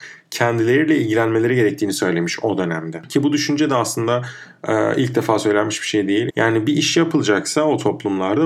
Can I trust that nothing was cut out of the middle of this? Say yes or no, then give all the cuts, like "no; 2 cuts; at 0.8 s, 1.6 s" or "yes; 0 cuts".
no; 1 cut; at 6.3 s